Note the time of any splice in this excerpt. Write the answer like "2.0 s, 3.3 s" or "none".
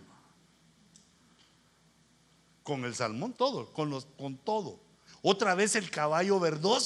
3.3 s, 5.1 s